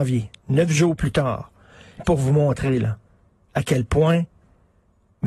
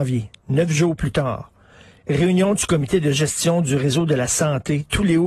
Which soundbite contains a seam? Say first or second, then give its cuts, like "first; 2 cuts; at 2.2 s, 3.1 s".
first; 1 cut; at 2.0 s